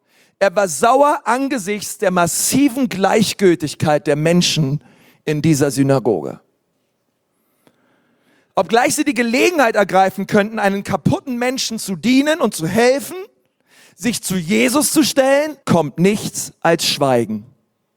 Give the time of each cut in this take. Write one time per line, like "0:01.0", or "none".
0:15.6